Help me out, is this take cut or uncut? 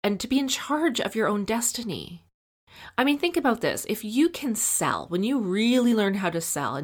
uncut